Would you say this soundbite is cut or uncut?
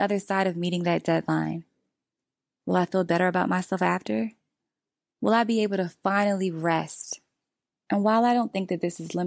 cut